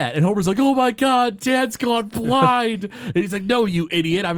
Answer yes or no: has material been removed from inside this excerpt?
no